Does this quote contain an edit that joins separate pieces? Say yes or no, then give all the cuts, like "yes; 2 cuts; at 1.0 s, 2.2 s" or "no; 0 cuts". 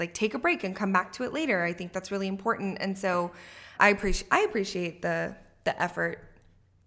yes; 1 cut; at 3.7 s